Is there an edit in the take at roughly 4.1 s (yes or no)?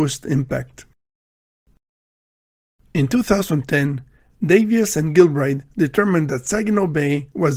no